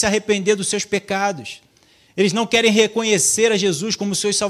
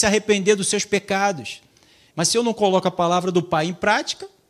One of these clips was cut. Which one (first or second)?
second